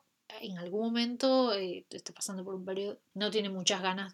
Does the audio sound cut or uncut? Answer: cut